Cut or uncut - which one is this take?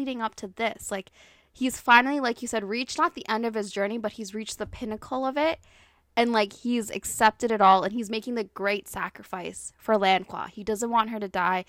uncut